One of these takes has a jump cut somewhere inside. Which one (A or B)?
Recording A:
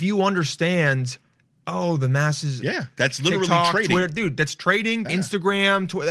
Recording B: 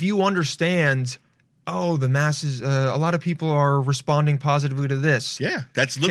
A